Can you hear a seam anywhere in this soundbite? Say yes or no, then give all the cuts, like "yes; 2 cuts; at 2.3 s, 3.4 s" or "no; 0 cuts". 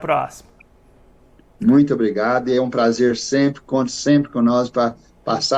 yes; 1 cut; at 1.4 s